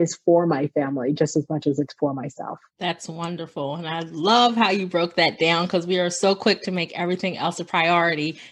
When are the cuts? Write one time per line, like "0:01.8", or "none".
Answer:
0:02.7